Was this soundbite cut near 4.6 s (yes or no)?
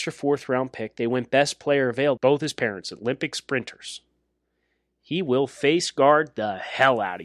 no